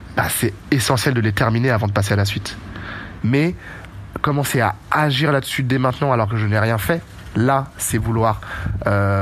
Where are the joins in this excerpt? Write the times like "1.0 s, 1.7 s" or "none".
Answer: 3.2 s